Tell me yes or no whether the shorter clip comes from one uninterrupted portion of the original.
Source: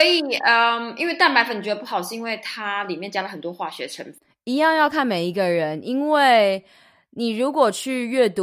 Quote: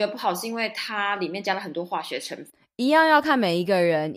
yes